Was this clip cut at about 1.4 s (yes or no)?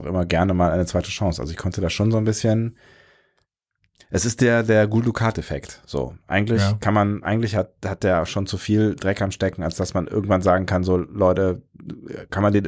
no